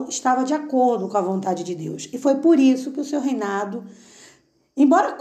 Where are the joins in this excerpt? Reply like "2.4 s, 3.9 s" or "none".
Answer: none